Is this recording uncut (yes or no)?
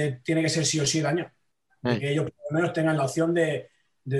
yes